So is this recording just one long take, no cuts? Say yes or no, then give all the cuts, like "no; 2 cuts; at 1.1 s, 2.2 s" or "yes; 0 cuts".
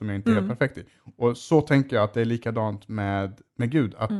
yes; 0 cuts